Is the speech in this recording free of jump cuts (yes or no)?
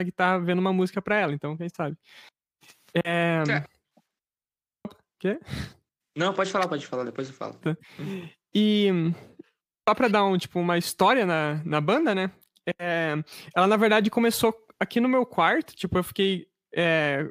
yes